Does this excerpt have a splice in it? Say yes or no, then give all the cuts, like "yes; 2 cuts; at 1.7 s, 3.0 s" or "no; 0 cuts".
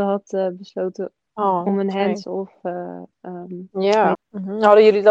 yes; 1 cut; at 4.1 s